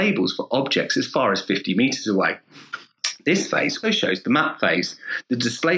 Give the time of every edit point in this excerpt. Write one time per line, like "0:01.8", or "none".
0:03.8